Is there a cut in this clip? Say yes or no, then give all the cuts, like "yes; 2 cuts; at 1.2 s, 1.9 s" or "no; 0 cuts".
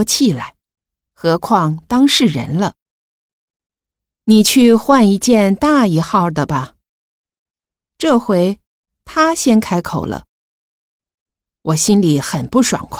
no; 0 cuts